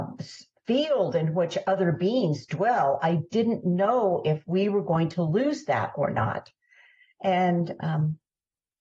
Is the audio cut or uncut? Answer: uncut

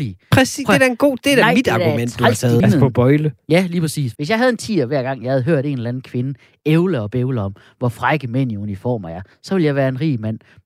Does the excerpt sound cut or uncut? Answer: cut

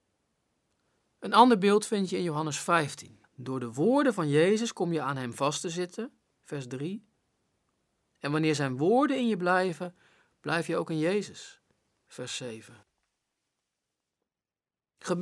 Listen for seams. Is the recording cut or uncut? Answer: cut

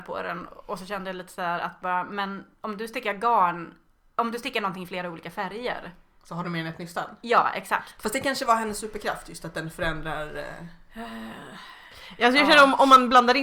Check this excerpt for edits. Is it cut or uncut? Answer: uncut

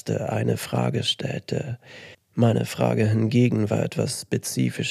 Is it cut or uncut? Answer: cut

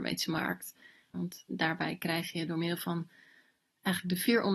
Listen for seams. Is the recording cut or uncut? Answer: cut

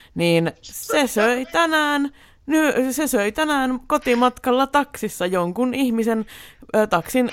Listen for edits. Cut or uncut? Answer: uncut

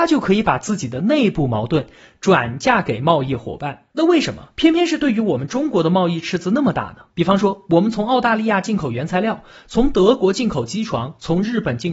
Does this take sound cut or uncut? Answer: cut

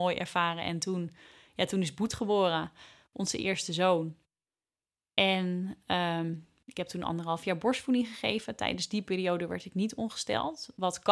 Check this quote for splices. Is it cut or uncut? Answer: uncut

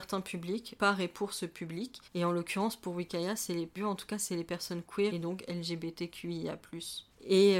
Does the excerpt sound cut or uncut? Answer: cut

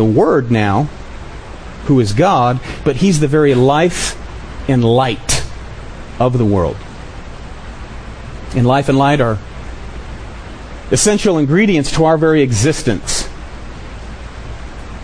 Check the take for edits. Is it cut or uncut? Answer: uncut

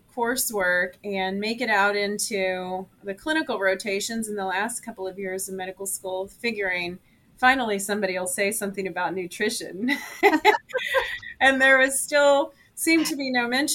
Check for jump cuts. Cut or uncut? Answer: cut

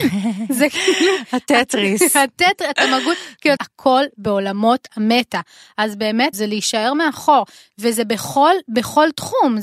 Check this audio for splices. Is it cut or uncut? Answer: cut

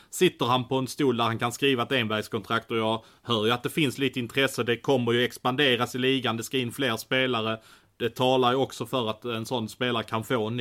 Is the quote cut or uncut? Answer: uncut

